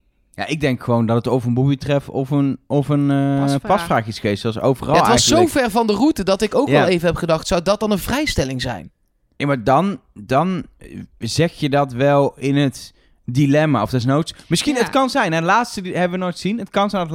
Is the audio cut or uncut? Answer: uncut